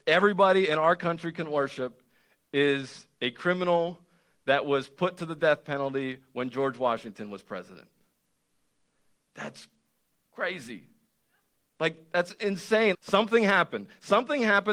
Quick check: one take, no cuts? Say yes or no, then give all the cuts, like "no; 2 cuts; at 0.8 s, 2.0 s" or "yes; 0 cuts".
no; 1 cut; at 12.9 s